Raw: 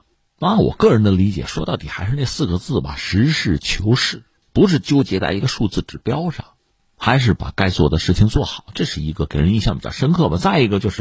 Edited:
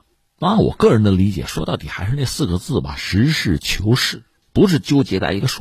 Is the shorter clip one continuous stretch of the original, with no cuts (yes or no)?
yes